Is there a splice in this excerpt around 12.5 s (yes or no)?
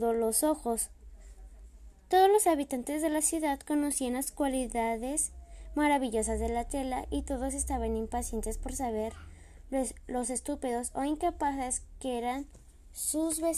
no